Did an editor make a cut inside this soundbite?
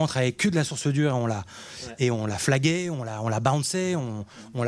no; 0 cuts

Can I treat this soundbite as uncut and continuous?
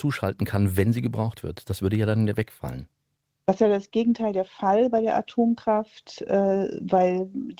yes; 0 cuts

